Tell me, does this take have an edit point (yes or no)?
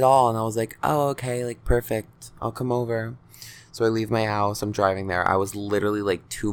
no